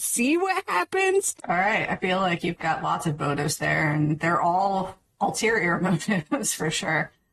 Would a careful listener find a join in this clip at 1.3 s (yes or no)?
yes